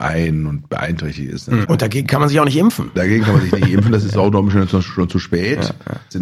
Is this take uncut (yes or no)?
no